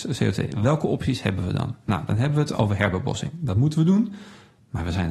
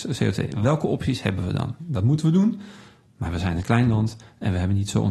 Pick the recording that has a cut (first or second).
second